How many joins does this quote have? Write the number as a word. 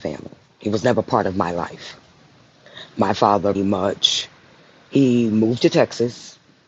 one